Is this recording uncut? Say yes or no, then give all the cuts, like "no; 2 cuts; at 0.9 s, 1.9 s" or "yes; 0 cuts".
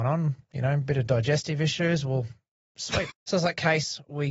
no; 1 cut; at 3.1 s